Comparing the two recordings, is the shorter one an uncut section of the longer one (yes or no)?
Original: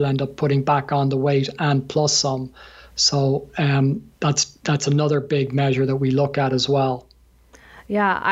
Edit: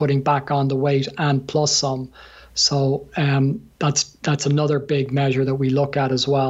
yes